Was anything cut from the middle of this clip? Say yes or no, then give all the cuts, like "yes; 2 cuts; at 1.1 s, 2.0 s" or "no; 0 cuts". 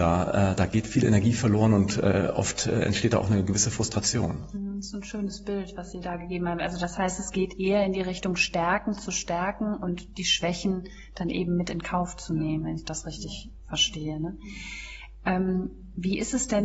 no; 0 cuts